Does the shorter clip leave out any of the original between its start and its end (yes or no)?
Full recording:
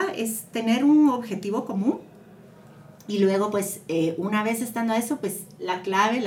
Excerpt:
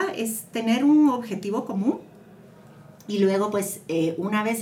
no